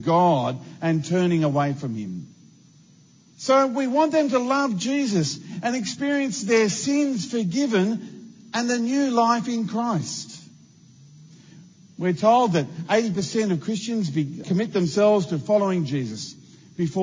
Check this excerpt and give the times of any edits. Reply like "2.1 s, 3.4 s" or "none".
3.3 s, 14.4 s

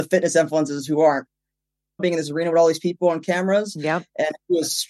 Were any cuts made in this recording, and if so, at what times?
2.0 s

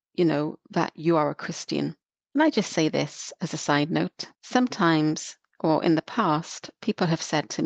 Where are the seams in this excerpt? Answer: 2.2 s, 4.3 s

